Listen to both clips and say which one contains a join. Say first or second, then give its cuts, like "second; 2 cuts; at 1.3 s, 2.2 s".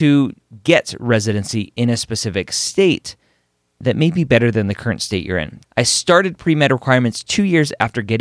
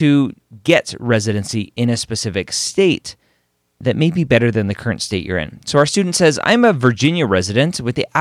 first; 1 cut; at 5.6 s